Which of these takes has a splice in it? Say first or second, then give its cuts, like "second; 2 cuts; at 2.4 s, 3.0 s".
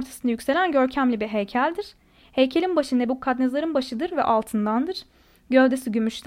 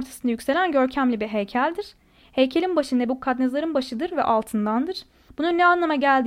second; 1 cut; at 5.3 s